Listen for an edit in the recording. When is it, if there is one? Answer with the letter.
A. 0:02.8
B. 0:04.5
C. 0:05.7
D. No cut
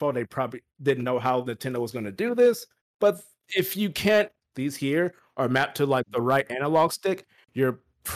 B